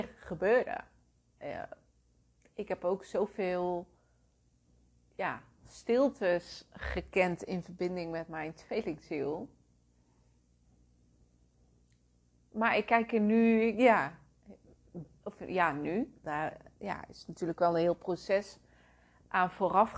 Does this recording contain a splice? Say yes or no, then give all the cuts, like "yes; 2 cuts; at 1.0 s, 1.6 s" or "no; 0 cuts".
yes; 1 cut; at 16.2 s